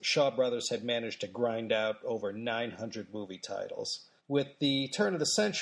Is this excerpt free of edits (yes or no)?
no